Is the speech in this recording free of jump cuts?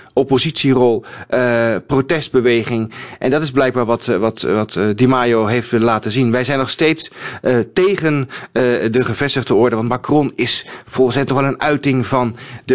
yes; 0 cuts

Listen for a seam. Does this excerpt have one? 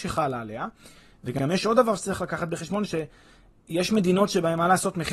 no; 0 cuts

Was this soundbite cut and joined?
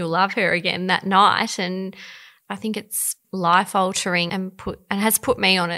yes; 2 cuts; at 3.2 s, 4.3 s

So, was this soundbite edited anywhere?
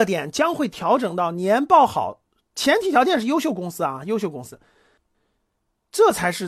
no; 0 cuts

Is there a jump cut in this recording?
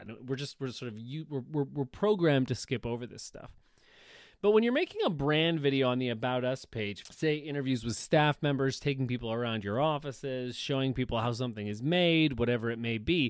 yes; 1 cut; at 7.0 s

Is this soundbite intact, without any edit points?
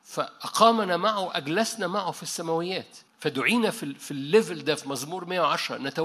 no; 1 cut; at 3.1 s

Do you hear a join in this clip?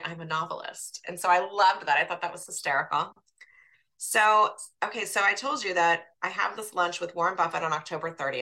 no; 0 cuts

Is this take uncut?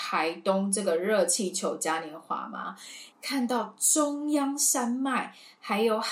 no; 1 cut; at 3.1 s

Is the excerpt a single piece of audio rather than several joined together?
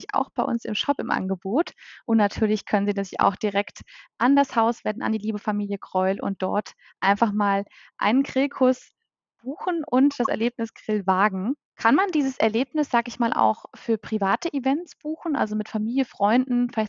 no; 1 cut; at 11.6 s

